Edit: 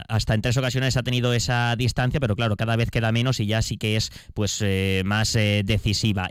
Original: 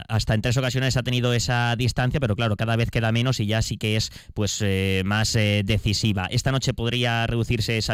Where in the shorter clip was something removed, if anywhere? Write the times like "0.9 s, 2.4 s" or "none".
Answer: none